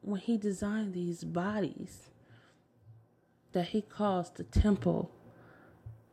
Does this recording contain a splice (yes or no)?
no